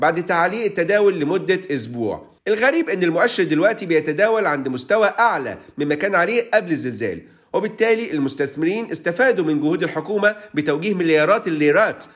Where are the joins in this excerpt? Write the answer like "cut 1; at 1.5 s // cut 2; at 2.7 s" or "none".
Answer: cut 1; at 2.4 s